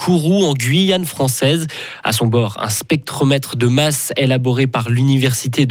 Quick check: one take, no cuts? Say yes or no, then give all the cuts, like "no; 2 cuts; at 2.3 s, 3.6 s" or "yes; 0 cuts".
yes; 0 cuts